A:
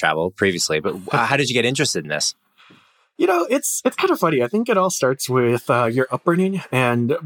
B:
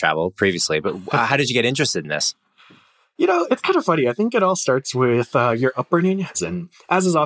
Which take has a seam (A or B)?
B